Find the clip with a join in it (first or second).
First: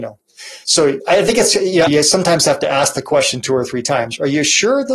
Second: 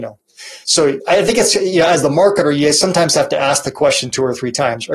first